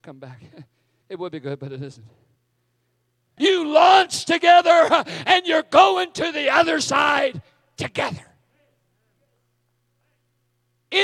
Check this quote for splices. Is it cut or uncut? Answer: cut